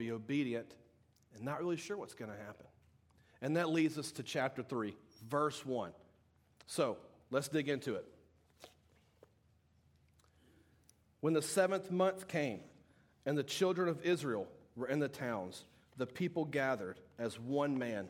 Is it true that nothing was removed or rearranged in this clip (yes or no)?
yes